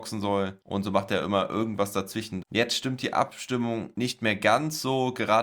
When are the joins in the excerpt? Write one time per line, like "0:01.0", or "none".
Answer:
0:02.4